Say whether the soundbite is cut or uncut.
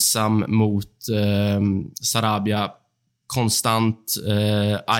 uncut